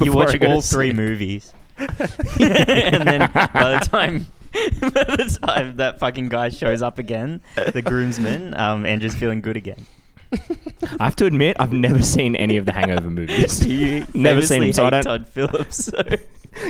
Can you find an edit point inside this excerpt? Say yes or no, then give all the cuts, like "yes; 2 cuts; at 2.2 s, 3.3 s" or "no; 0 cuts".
no; 0 cuts